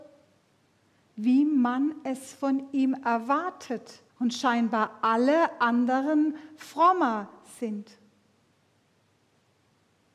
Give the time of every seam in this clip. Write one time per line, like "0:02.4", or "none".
0:01.1
0:04.1